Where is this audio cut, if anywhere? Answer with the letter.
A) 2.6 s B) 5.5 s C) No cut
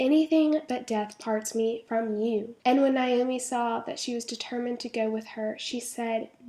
C